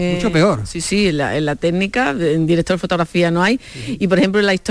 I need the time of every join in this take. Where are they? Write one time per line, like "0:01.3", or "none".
none